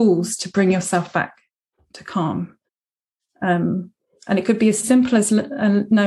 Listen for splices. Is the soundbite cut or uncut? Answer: uncut